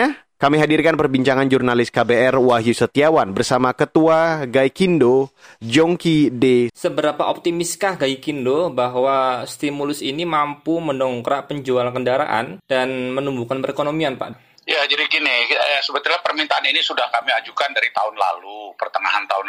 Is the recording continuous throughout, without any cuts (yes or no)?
no